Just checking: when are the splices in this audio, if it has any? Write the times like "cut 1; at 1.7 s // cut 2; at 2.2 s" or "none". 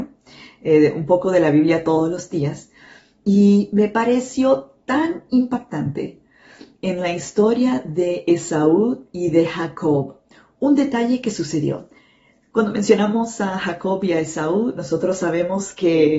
none